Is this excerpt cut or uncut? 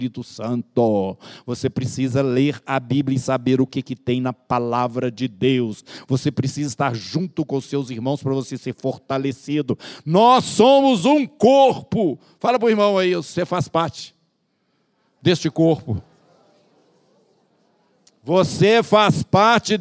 uncut